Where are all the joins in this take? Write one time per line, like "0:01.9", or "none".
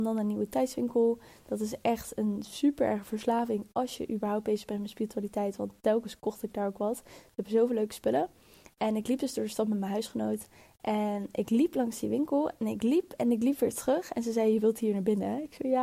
none

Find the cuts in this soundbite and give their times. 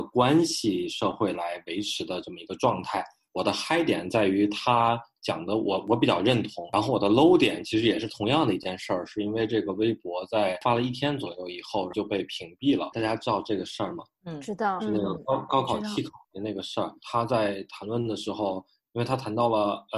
0:12.9

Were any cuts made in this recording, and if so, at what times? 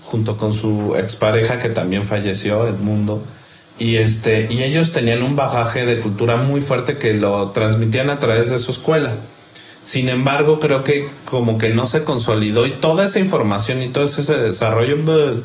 none

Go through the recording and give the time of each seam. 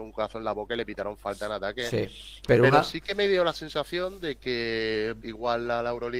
0:02.4
0:05.2

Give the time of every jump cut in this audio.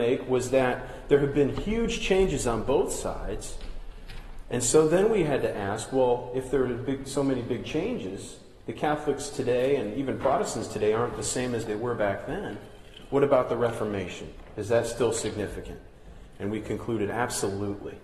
none

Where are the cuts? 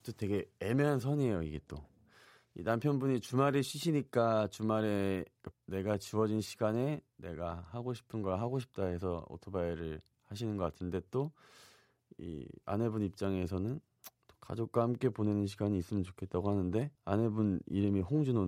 0:05.5
0:17.0

